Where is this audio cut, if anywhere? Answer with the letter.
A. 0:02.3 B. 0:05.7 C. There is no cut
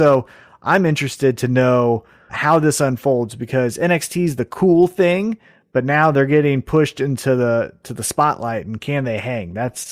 A